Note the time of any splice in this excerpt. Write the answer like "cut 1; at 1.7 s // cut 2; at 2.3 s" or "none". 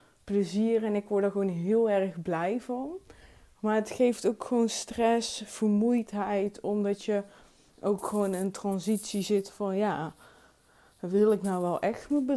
none